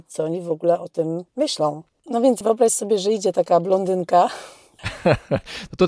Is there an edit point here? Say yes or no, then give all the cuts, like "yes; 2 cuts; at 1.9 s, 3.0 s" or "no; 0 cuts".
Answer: yes; 1 cut; at 2.0 s